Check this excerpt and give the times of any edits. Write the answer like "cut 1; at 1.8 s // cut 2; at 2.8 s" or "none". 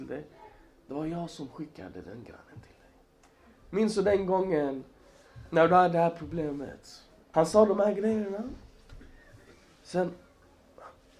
cut 1; at 7.3 s